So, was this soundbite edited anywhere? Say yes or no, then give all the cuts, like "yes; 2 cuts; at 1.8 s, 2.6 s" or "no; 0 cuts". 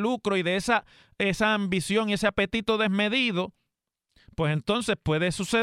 no; 0 cuts